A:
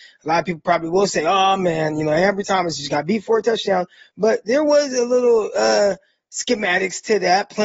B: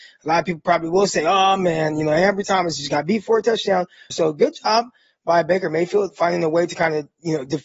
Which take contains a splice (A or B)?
B